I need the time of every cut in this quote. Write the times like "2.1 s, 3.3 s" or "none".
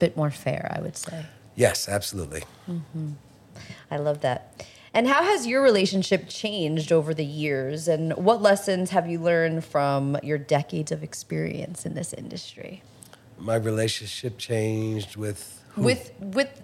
none